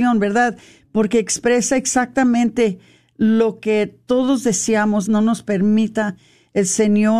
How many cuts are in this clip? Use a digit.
1